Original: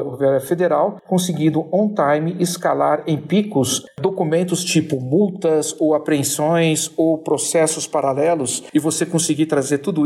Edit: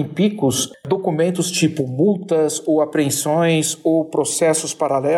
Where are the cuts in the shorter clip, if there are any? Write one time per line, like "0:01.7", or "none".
none